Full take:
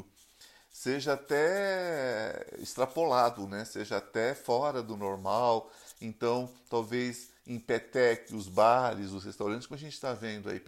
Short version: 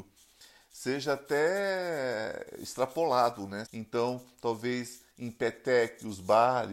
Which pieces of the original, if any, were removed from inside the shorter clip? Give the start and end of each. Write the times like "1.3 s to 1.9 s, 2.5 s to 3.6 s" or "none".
3.7 s to 5.9 s